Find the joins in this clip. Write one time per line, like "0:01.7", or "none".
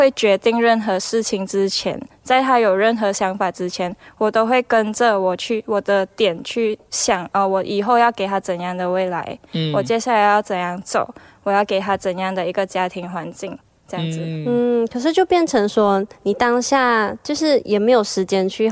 none